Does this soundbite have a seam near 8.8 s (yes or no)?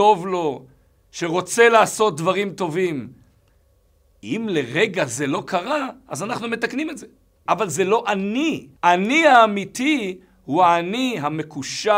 yes